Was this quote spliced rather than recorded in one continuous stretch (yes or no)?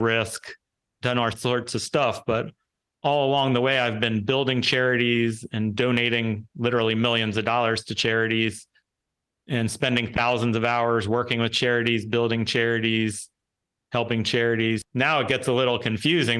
yes